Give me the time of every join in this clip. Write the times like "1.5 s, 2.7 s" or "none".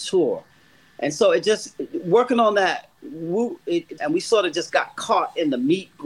4.0 s